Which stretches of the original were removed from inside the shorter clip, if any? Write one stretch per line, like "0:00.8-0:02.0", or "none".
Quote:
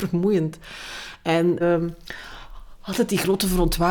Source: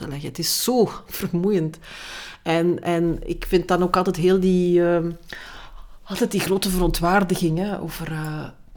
0:02.8-0:04.8